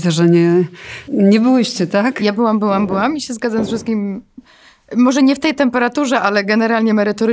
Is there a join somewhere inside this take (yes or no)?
yes